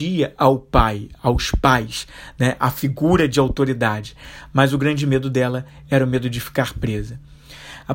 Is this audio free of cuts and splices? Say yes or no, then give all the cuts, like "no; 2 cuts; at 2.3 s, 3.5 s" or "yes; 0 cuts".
yes; 0 cuts